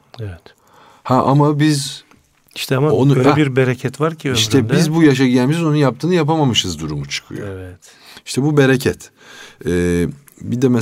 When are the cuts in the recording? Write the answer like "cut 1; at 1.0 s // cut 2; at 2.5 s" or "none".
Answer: none